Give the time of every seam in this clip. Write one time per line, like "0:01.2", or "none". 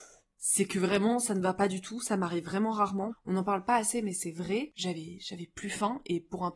0:03.1
0:04.7

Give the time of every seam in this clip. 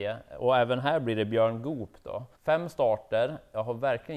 0:02.3

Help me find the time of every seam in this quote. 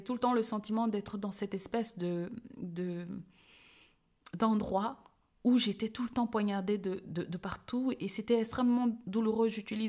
none

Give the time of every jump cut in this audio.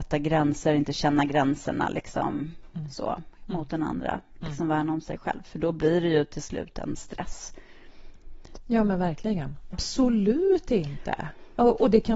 0:08.6
0:09.7

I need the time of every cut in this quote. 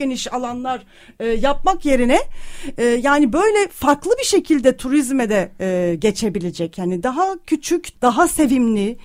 0:07.9

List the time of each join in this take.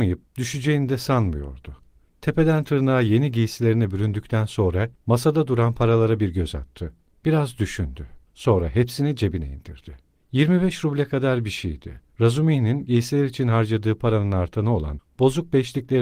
none

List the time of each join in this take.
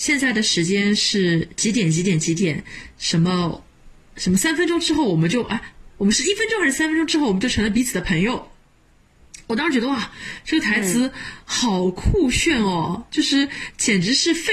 none

